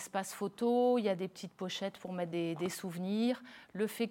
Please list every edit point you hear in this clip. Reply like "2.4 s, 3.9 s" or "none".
none